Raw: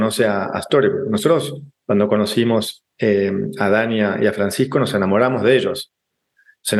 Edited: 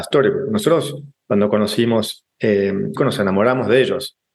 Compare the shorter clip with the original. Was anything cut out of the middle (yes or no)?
yes